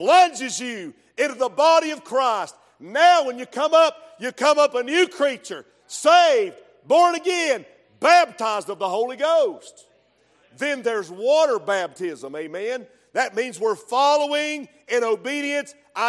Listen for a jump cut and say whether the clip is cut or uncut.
uncut